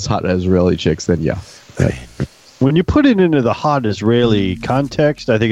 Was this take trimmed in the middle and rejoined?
yes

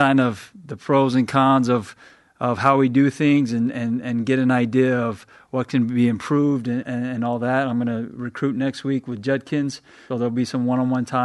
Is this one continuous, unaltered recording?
no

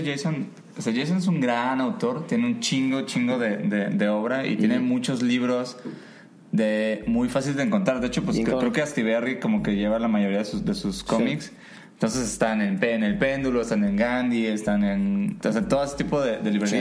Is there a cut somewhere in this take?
no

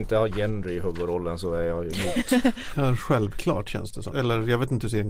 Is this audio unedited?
no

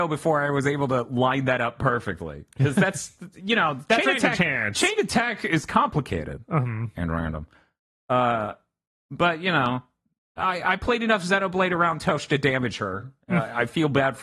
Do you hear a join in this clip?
no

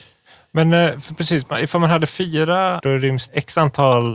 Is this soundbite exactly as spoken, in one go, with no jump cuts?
no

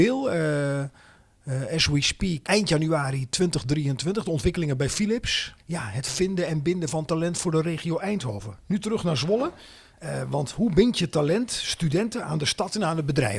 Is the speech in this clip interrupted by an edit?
yes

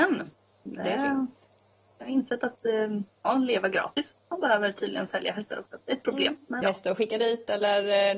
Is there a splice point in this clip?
yes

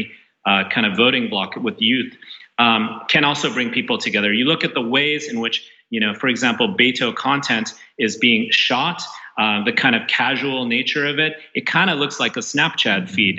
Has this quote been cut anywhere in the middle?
no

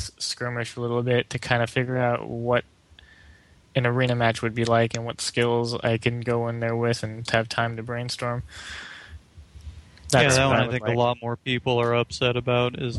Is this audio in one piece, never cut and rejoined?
no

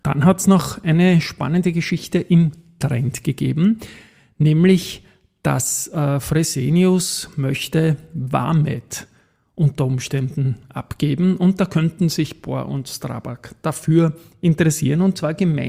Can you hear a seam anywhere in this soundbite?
no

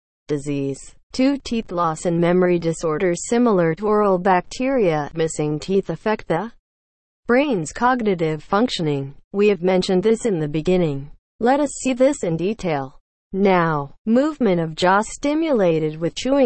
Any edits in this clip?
no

